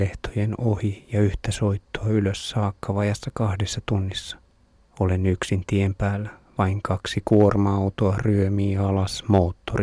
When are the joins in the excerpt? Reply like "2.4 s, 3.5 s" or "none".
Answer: none